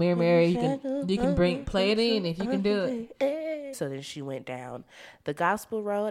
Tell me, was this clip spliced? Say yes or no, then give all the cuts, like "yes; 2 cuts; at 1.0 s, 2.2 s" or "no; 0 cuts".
yes; 1 cut; at 3.7 s